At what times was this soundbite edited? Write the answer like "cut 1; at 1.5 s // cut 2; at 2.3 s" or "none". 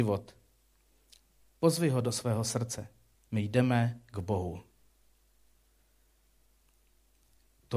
cut 1; at 3.1 s